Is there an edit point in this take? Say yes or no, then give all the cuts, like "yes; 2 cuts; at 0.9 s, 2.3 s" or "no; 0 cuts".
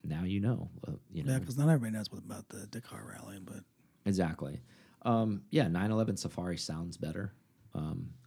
no; 0 cuts